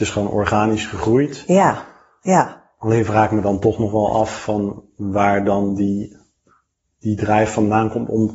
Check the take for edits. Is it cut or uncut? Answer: uncut